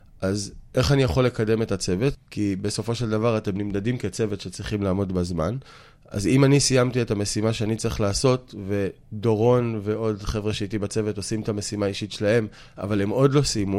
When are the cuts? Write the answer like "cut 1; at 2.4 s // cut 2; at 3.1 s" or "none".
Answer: cut 1; at 2.1 s